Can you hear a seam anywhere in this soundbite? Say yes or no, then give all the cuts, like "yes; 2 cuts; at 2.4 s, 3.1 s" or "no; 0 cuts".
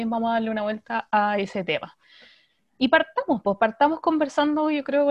no; 0 cuts